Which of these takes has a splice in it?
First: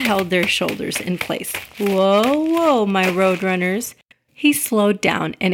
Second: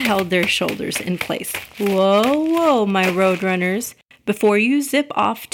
first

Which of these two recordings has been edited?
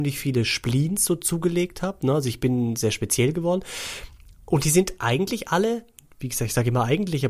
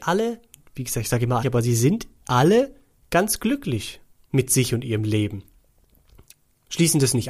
second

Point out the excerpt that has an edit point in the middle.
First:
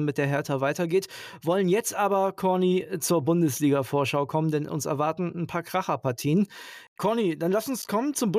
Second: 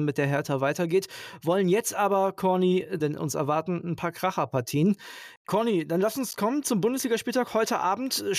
second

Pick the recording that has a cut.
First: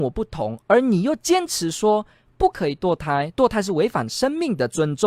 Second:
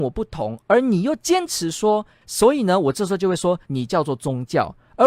second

